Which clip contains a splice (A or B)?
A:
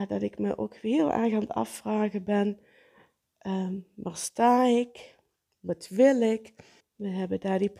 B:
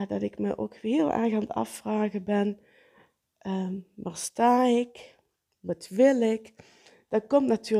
A